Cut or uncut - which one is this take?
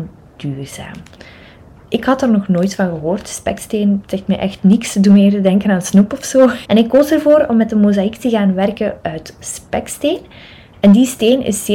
cut